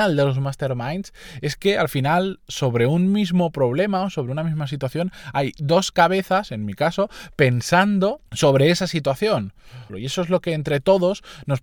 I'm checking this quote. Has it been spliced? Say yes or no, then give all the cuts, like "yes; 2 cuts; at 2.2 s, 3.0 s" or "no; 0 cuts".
yes; 2 cuts; at 8.3 s, 9.9 s